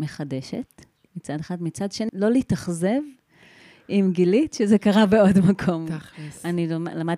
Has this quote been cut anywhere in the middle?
yes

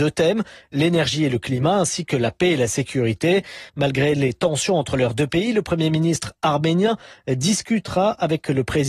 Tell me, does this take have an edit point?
yes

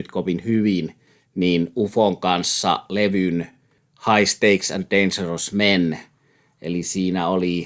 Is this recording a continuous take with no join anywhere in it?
yes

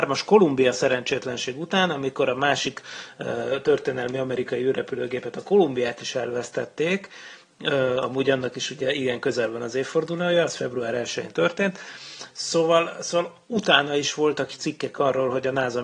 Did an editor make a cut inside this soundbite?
no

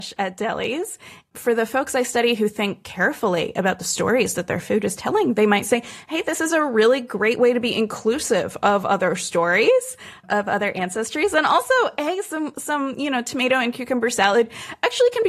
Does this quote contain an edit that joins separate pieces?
no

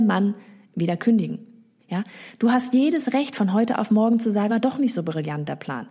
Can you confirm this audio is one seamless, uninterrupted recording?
no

